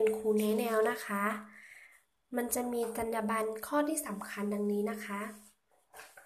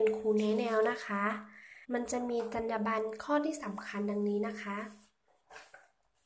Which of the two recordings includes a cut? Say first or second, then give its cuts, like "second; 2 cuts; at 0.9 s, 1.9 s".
second; 1 cut; at 1.8 s